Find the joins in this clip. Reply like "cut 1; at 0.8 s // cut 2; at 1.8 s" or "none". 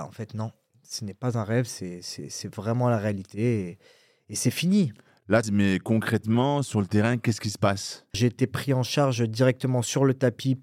cut 1; at 5.4 s // cut 2; at 8.1 s